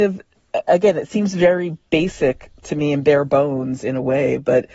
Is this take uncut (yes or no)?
yes